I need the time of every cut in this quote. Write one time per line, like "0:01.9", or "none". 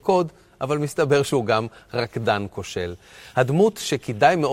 none

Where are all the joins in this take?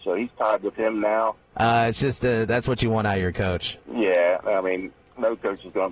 0:01.5
0:03.8

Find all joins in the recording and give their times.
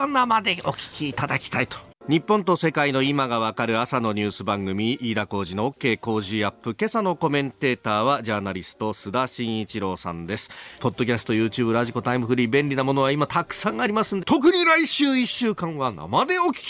0:01.9
0:10.8
0:14.2

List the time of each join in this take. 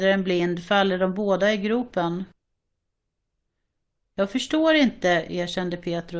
none

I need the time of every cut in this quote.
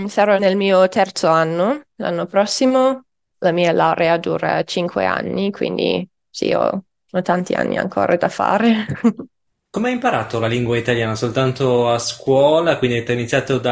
none

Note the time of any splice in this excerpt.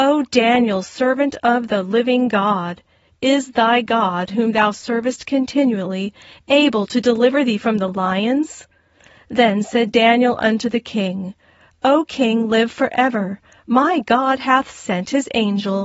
none

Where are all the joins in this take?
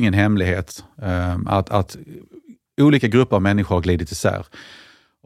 none

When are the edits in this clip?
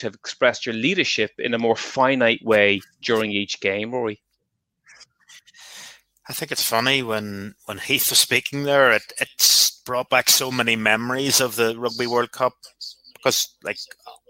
none

